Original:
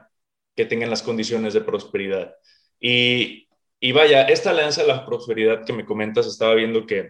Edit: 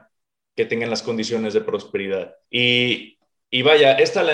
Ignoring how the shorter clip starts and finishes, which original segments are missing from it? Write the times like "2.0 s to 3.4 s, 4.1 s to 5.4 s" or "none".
2.4 s to 2.7 s